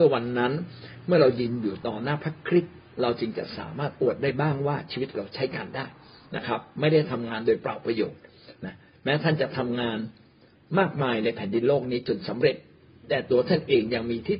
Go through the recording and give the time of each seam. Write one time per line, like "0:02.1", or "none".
none